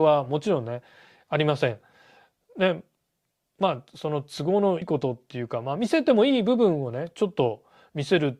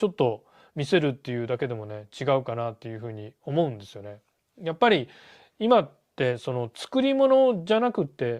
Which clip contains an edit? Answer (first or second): first